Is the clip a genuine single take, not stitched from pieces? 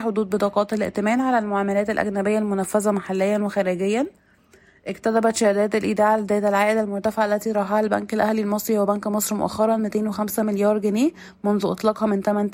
yes; 0 cuts

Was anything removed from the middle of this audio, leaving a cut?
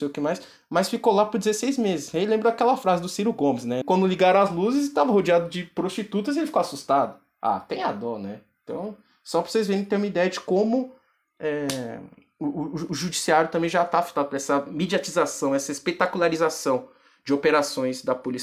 yes; 1 cut; at 3.8 s

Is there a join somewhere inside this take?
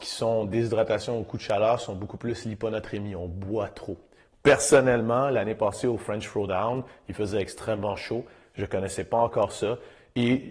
no; 0 cuts

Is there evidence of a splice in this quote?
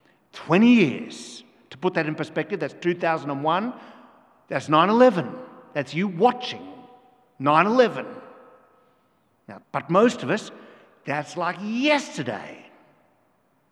yes; 1 cut; at 9.6 s

